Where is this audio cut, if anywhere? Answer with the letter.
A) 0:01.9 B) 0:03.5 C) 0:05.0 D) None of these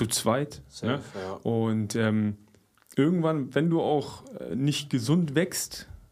D